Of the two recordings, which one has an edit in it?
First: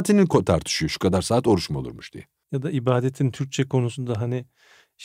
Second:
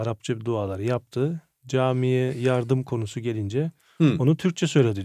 first; 1 cut; at 2.4 s

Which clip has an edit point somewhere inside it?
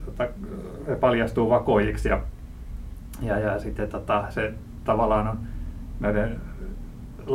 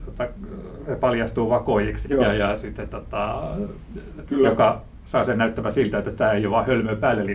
second; 2 cuts; at 2.0 s, 4.3 s

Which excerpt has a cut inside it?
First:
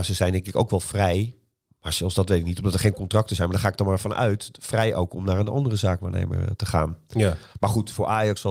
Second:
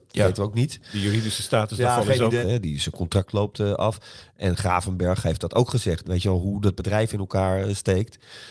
second; 2 cuts; at 2.4 s, 6.0 s

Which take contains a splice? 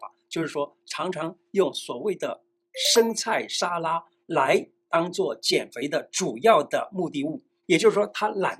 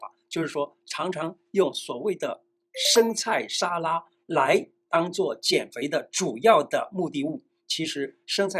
first; 1 cut; at 7.6 s

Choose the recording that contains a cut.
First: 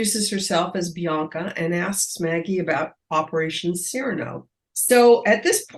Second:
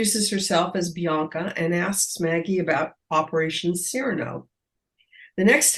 first; 1 cut; at 4.7 s

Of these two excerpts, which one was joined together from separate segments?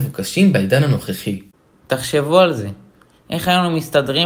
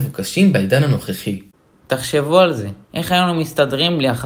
second; 1 cut; at 2.8 s

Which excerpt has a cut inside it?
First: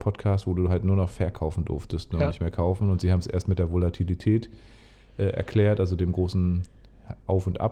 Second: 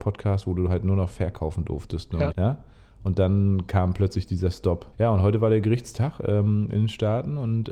second; 2 cuts; at 2.3 s, 4.9 s

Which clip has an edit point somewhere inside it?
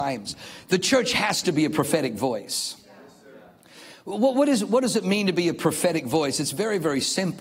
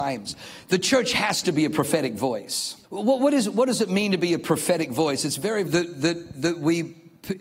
second; 2 cuts; at 2.8 s, 5.7 s

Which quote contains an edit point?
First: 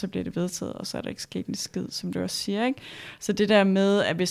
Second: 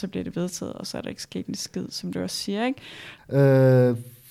second; 1 cut; at 3.2 s

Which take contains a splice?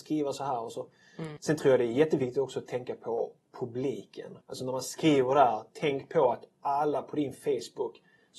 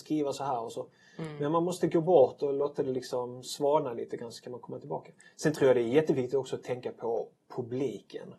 first; 2 cuts; at 1.4 s, 4.4 s

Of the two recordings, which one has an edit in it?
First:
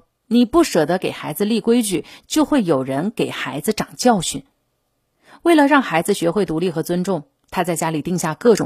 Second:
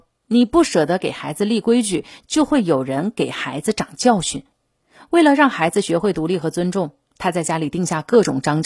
second; 1 cut; at 4.5 s

